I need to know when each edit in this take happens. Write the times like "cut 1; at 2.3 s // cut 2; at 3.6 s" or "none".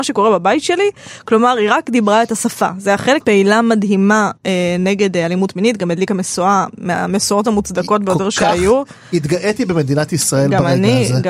cut 1; at 3.2 s

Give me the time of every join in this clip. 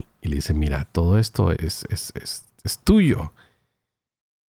cut 1; at 1.5 s

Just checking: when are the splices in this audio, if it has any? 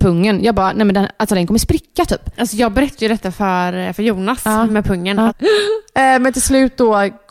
cut 1; at 5.3 s

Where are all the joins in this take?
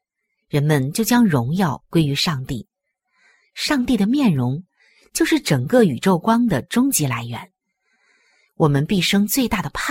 none

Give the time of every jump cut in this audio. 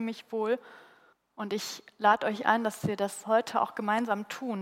cut 1; at 1.1 s

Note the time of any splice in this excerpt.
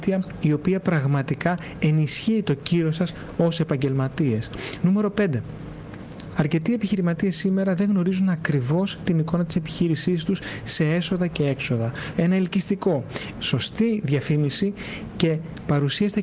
cut 1; at 6.3 s // cut 2; at 12.1 s // cut 3; at 13.3 s

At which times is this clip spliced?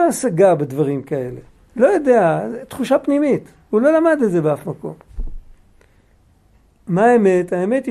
cut 1; at 1.5 s

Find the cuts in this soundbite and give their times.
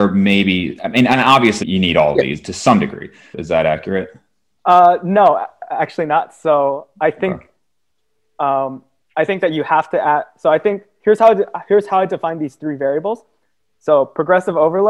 cut 1; at 1.6 s // cut 2; at 3.3 s

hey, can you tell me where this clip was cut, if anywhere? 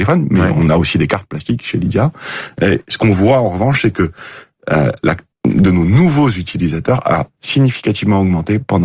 cut 1; at 5.3 s

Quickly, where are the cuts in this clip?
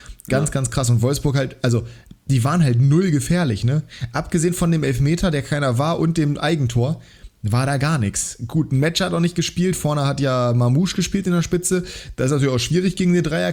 none

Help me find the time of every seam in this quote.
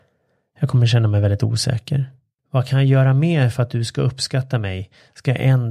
cut 1; at 2.4 s

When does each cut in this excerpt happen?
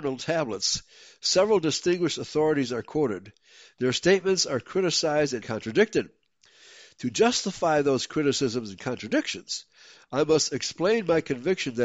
cut 1; at 5.4 s

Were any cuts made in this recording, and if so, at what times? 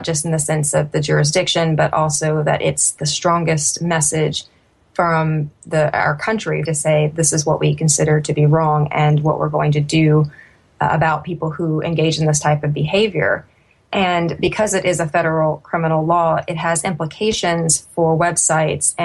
cut 1; at 6.6 s

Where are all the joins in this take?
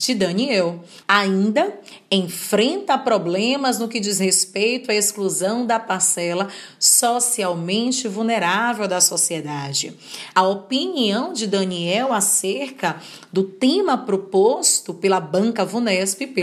cut 1; at 1.0 s // cut 2; at 10.3 s

